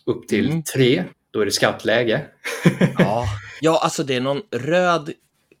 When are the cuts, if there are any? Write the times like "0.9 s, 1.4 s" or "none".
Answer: 1.1 s, 3.6 s